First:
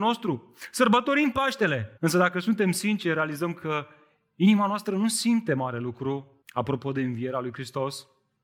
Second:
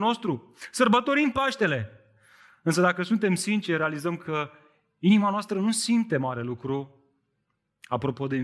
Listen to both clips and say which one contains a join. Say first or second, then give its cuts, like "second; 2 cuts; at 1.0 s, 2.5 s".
first; 2 cuts; at 2.0 s, 6.4 s